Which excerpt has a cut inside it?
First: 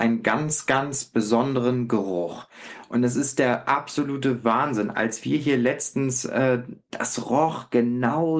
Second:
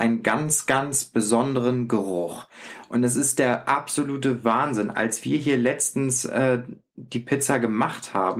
first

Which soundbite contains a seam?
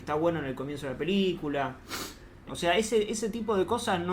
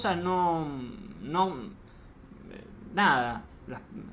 first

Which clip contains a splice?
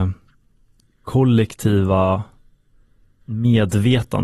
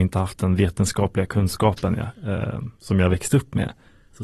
first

